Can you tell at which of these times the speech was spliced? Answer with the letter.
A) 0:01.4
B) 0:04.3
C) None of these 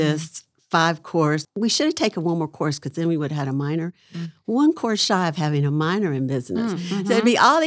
A